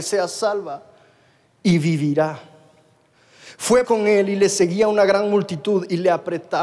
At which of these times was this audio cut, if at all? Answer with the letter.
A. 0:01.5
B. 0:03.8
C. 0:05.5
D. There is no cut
B